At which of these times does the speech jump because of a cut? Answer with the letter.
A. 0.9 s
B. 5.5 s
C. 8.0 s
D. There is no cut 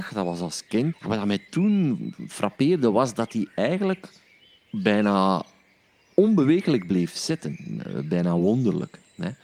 A